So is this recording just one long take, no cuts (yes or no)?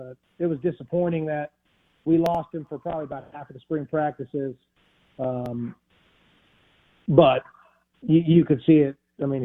yes